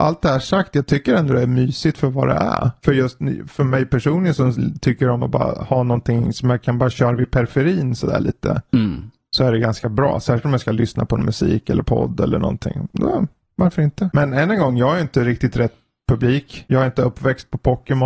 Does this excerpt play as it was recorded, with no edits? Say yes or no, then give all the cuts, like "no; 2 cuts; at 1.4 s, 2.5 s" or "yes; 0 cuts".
yes; 0 cuts